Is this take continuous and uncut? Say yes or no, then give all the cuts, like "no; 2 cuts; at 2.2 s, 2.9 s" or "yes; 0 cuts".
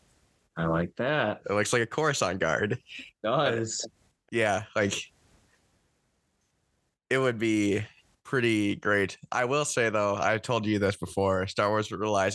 no; 1 cut; at 4.2 s